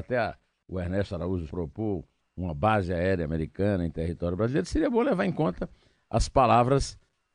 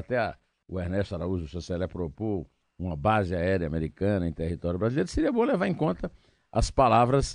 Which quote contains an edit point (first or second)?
first